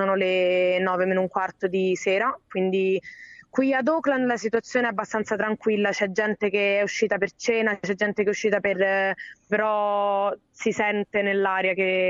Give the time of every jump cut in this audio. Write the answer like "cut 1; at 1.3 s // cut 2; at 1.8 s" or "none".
cut 1; at 9.5 s